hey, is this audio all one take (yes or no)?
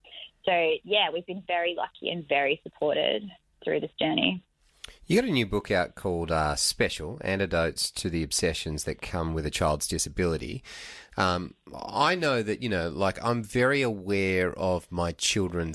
yes